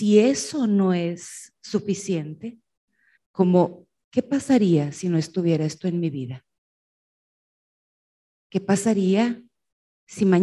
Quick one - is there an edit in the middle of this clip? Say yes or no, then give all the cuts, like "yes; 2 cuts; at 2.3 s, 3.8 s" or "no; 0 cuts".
yes; 1 cut; at 3.2 s